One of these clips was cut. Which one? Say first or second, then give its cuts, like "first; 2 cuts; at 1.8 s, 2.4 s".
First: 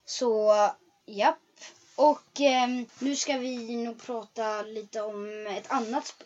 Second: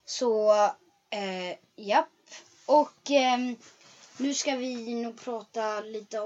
first; 2 cuts; at 1.0 s, 2.9 s